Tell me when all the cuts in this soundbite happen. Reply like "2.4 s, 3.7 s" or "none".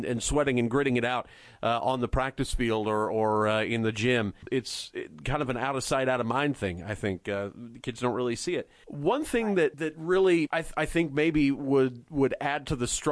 none